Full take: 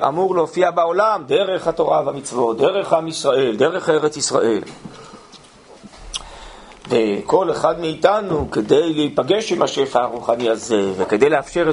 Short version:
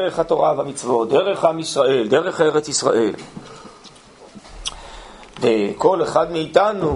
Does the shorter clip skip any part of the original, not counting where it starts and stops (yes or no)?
no